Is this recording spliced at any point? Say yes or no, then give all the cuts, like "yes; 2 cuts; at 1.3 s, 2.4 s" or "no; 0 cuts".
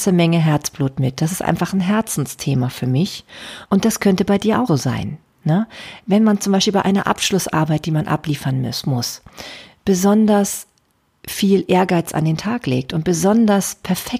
yes; 2 cuts; at 3.6 s, 4.7 s